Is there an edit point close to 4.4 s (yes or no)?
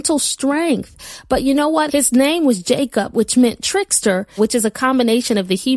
yes